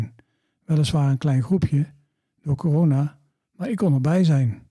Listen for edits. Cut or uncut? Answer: uncut